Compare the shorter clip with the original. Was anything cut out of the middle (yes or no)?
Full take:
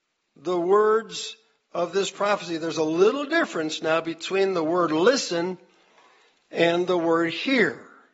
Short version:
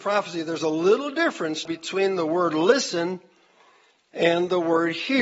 yes